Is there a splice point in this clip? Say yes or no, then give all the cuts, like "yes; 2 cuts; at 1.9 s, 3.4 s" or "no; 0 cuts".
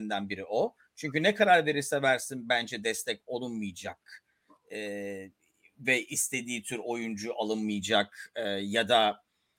no; 0 cuts